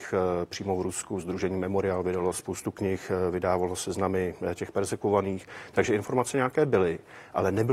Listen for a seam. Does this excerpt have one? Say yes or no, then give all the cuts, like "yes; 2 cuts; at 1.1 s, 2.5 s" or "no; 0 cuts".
yes; 1 cut; at 2.3 s